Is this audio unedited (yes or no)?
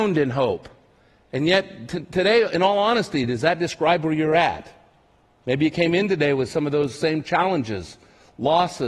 yes